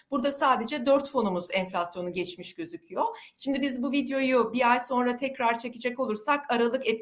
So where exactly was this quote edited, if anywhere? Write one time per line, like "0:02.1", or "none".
none